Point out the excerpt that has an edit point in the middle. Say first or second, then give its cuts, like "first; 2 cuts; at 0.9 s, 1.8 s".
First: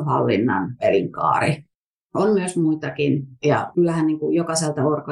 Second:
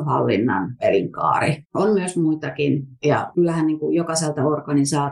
second; 1 cut; at 1.7 s